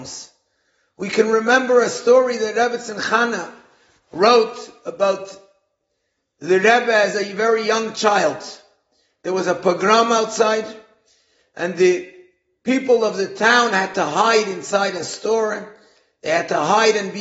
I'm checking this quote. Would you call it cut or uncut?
uncut